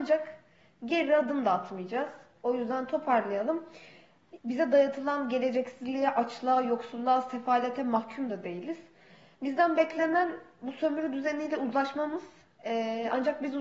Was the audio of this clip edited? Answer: yes; 2 cuts; at 2.4 s, 4.4 s

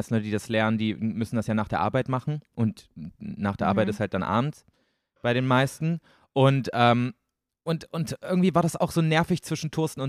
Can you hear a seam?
no; 0 cuts

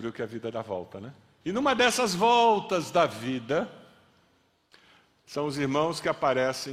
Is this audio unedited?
no; 1 cut; at 1.4 s

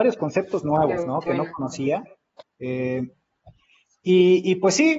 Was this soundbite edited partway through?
no; 0 cuts

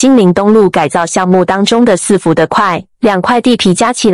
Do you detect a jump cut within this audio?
yes; 1 cut; at 2.9 s

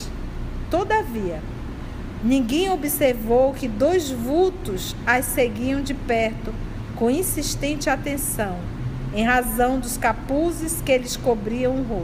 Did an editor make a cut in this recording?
yes; 2 cuts; at 2.2 s, 9.1 s

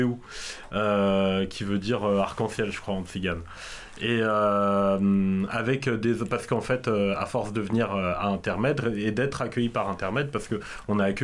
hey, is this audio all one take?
yes; 0 cuts

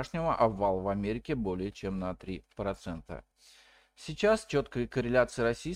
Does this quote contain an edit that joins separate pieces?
no; 0 cuts

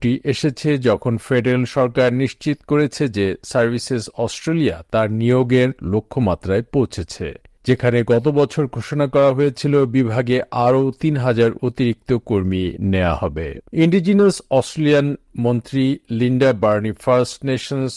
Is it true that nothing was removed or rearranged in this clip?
no; 1 cut; at 13.7 s

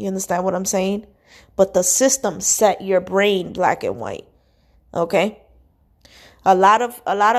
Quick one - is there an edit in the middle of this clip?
no; 0 cuts

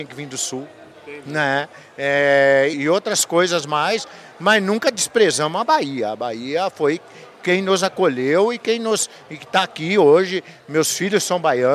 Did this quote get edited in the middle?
yes; 1 cut; at 2.7 s

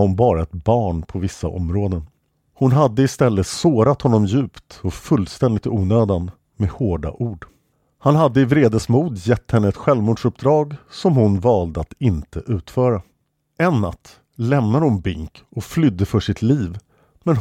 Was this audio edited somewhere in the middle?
no; 0 cuts

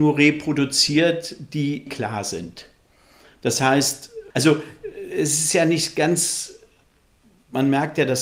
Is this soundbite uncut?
no; 2 cuts; at 1.9 s, 4.3 s

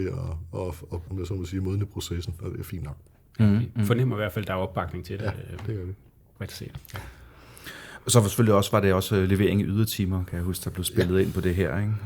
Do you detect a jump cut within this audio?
yes; 1 cut; at 1.1 s

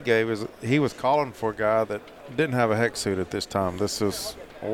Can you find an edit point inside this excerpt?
no; 0 cuts

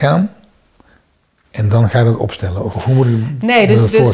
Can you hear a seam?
yes; 1 cut; at 2.7 s

